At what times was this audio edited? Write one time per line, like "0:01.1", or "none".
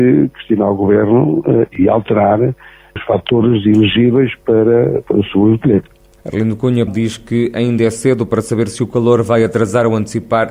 0:05.0
0:06.9